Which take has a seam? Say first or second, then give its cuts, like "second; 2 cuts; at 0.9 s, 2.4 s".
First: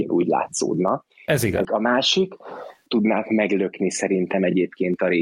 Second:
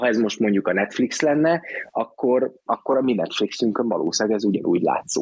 first; 2 cuts; at 1.6 s, 2.9 s